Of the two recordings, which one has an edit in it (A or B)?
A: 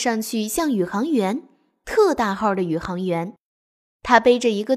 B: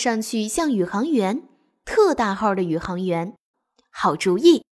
B